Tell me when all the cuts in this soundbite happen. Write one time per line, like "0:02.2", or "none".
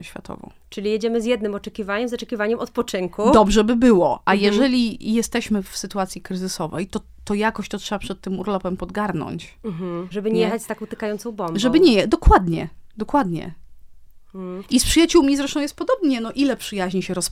0:10.1

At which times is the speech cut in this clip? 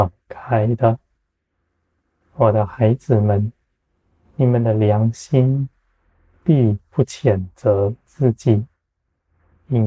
none

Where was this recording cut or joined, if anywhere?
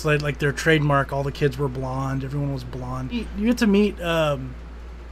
none

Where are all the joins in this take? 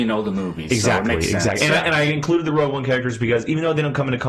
none

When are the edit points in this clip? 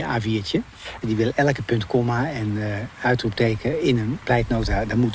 0:01.0

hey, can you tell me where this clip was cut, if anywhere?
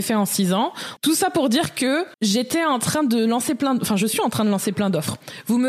0:01.0
0:02.1

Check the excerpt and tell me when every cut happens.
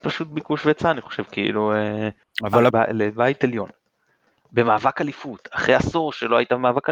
0:02.7

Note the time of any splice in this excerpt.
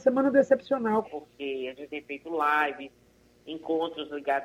0:01.0

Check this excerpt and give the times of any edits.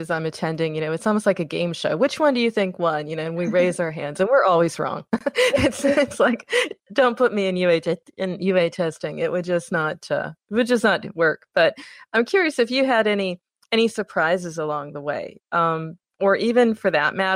none

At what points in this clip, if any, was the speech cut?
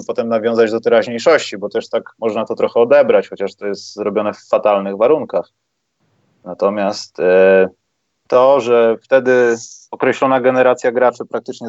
none

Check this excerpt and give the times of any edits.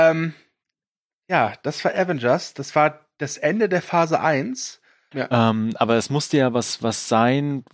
0:05.1

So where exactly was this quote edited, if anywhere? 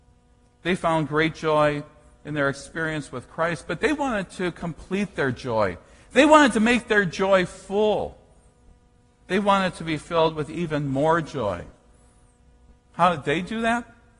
none

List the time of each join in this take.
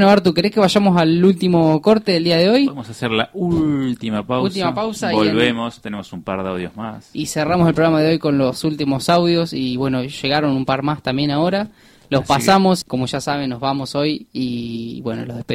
0:12.8

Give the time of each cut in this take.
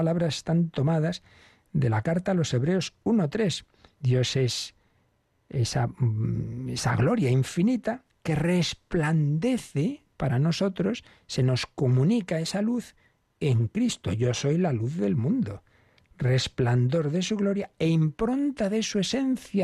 0:02.5
0:04.0

